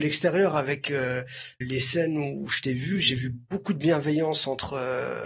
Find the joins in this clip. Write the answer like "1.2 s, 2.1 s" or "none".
1.6 s